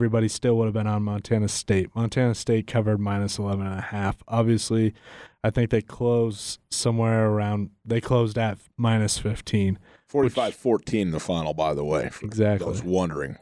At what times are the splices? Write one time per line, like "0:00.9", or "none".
none